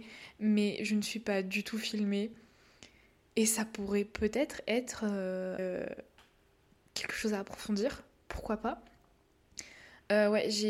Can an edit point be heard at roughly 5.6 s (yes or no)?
yes